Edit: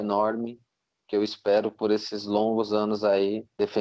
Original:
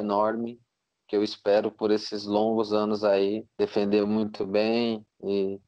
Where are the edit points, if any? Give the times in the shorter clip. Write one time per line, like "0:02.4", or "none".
none